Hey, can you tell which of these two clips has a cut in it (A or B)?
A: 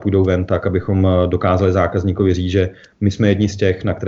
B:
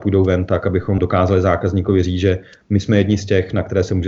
B